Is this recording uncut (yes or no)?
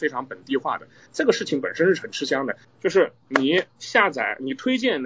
no